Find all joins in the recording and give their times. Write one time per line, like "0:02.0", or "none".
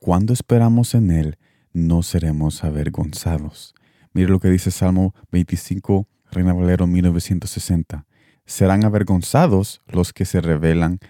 0:06.2
0:08.3

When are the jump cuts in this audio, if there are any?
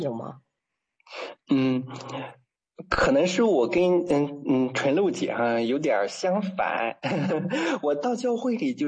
none

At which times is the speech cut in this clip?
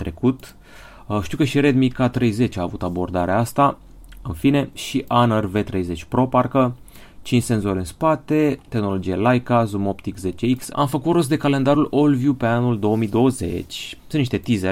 0:10.7

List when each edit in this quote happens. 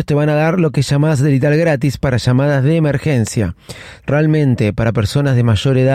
0:04.0

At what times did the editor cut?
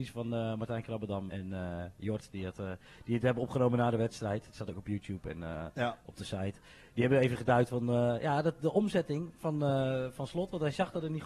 0:01.3

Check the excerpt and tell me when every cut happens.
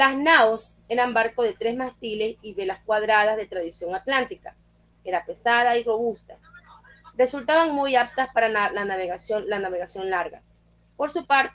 none

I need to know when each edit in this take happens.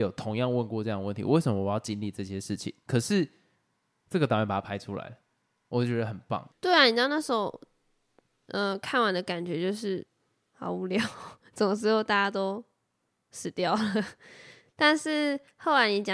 0:06.5

